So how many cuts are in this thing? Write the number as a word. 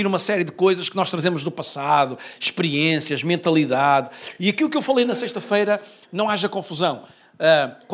zero